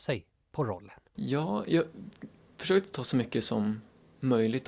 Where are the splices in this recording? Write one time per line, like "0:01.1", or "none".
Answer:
none